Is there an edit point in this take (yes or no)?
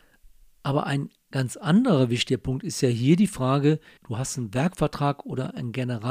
yes